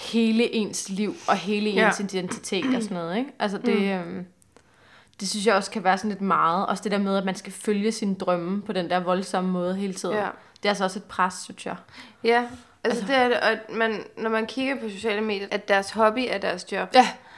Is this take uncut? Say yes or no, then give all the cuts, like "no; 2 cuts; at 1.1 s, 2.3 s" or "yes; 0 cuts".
no; 1 cut; at 15.5 s